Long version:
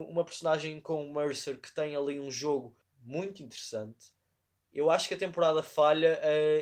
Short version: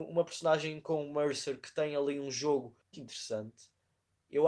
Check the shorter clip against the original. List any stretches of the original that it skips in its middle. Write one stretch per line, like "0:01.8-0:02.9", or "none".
0:02.9-0:03.4